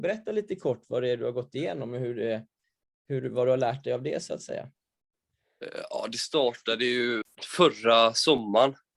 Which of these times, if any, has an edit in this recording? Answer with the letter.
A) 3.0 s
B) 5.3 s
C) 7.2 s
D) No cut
C